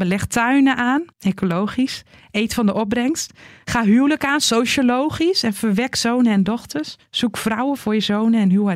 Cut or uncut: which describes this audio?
cut